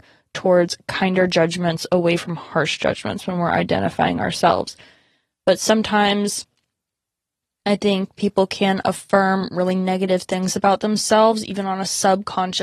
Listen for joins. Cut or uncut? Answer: uncut